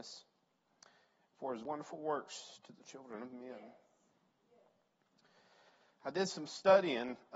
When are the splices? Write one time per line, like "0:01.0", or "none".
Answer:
none